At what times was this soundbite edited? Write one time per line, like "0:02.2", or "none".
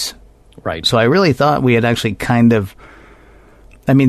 none